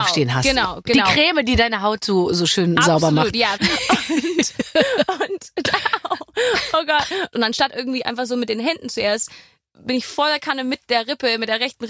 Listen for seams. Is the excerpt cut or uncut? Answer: cut